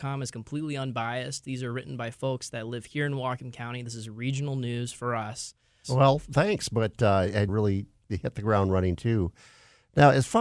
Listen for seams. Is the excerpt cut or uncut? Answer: cut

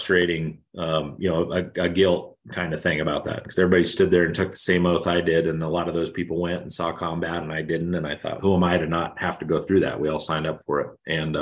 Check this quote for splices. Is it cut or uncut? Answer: cut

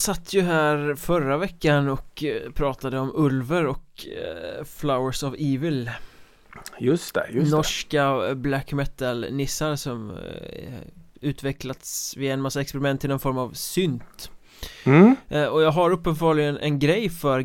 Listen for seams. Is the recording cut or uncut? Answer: uncut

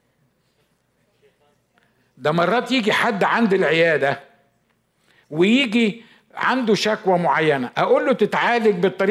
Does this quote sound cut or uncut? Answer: uncut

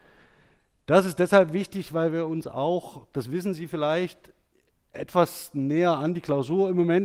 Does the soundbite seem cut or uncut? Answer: uncut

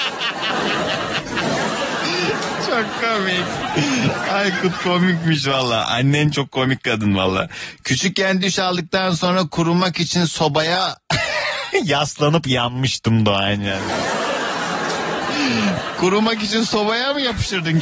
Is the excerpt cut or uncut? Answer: uncut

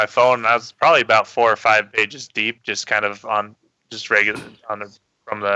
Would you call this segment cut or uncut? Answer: uncut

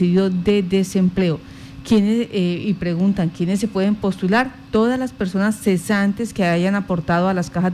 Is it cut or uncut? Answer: uncut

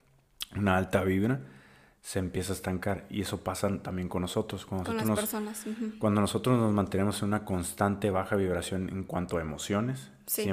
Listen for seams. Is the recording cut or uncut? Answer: uncut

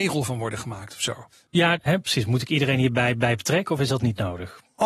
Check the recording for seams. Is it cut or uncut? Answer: cut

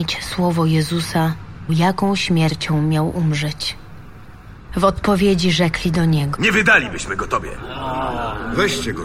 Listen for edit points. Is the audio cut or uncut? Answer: cut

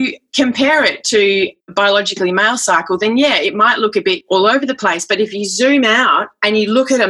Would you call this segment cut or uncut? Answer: cut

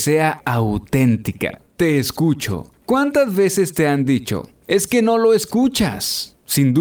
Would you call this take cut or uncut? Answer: uncut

